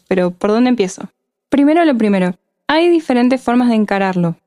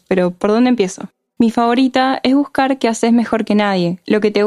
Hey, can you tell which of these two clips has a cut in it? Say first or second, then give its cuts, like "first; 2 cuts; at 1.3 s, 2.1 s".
second; 1 cut; at 1.3 s